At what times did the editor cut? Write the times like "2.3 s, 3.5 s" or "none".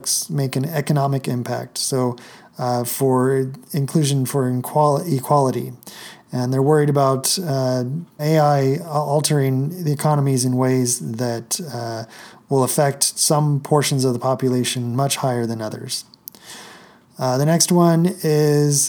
8.2 s, 17.0 s